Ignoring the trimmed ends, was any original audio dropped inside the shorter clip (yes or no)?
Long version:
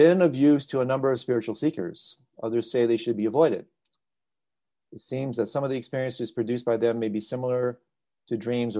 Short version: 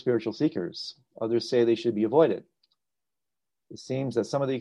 no